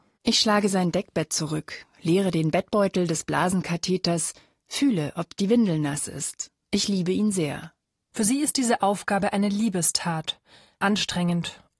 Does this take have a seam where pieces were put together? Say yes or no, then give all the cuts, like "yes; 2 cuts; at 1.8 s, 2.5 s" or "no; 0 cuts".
yes; 1 cut; at 8.1 s